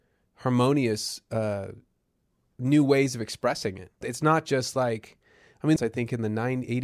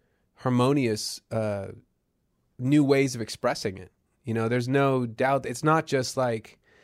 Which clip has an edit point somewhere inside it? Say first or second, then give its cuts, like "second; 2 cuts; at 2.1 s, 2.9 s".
first; 2 cuts; at 4.0 s, 5.8 s